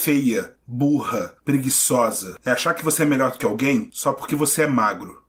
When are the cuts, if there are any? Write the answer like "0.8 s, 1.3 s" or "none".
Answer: 1.4 s